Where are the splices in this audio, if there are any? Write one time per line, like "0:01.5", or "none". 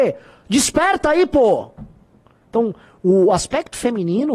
0:02.4